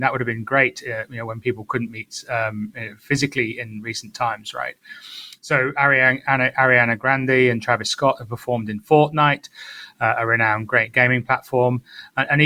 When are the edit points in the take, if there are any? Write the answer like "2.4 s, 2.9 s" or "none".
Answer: none